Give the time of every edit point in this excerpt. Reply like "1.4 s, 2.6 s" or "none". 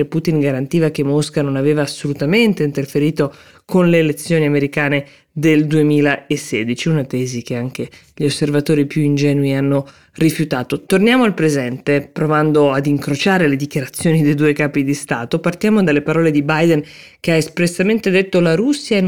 none